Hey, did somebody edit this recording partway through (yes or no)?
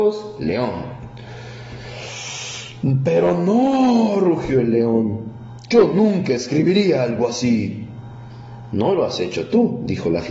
no